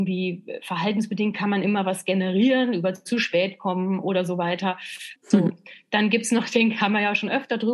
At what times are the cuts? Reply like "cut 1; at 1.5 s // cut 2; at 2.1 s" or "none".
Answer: cut 1; at 5.2 s